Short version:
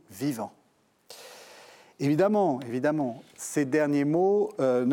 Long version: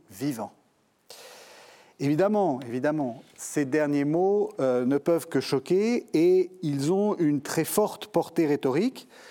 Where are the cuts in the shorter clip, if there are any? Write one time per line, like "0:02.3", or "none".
none